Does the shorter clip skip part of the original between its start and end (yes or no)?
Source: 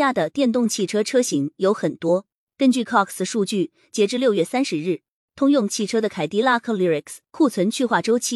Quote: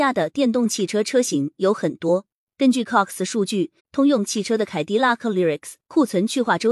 yes